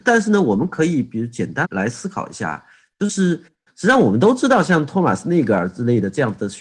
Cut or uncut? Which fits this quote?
cut